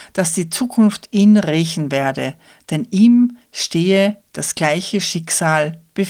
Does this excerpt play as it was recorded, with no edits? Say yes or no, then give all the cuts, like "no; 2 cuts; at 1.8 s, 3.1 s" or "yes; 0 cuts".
yes; 0 cuts